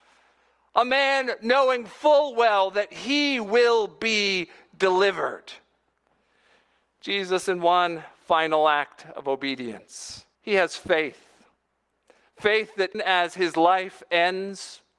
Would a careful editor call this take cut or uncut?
cut